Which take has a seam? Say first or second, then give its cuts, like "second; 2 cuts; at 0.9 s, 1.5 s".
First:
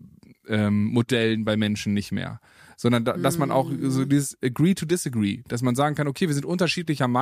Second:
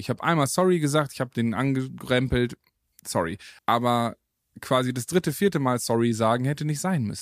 second; 1 cut; at 3.6 s